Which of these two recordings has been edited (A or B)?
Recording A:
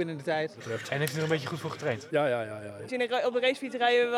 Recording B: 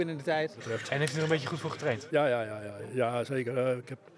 A